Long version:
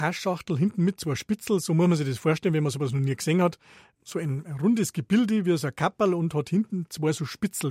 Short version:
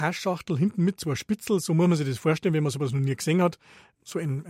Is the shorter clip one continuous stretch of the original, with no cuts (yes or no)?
yes